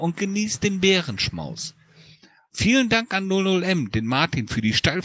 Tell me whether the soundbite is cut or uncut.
cut